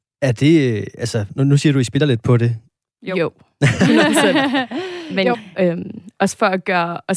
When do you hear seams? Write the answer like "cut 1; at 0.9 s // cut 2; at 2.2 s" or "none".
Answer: cut 1; at 3.0 s // cut 2; at 5.3 s